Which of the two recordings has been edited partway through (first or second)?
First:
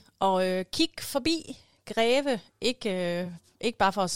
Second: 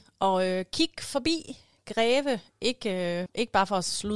second